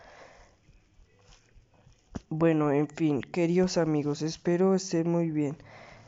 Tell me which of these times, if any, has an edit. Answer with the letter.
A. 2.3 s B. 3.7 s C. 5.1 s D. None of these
D